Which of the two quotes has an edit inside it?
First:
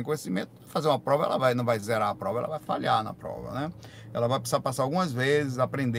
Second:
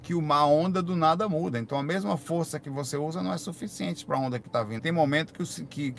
second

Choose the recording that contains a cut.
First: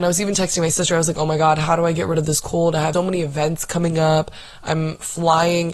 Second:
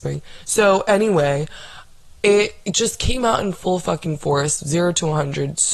first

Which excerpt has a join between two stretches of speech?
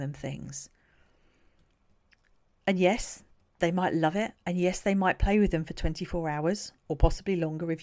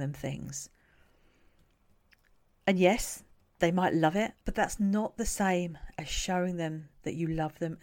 second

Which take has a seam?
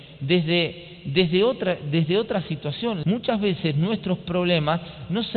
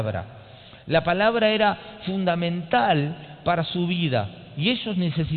first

